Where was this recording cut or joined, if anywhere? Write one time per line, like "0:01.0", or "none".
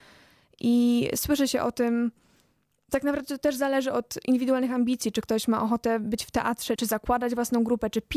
0:06.8